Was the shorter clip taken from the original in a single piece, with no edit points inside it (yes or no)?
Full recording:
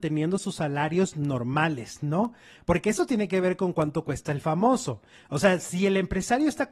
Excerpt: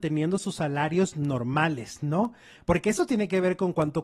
yes